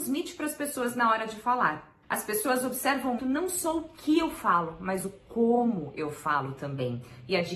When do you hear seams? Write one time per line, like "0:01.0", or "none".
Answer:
0:03.2

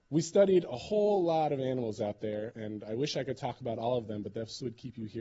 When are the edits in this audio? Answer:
none

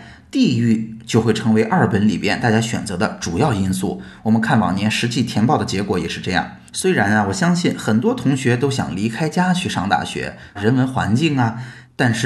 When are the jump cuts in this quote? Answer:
0:06.7
0:10.6

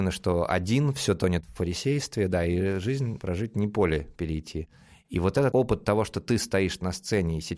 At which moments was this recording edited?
0:05.5

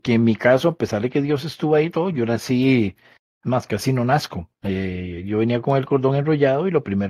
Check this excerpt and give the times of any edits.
none

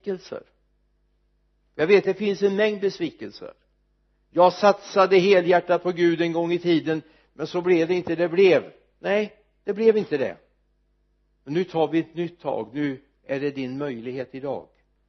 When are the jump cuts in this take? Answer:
0:08.2

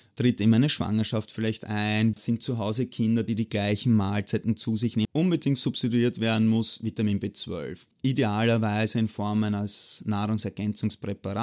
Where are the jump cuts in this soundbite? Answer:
0:02.1
0:05.0

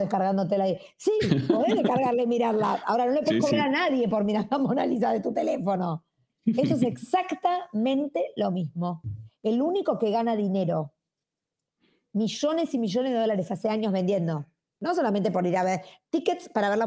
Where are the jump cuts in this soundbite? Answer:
none

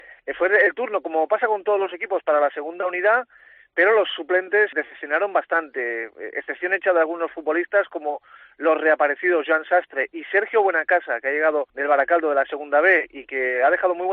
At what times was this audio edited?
0:04.7
0:11.7

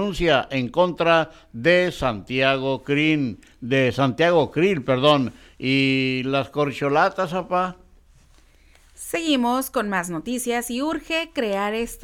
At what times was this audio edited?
none

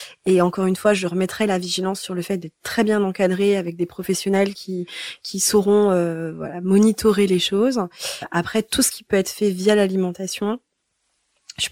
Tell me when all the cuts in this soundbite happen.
none

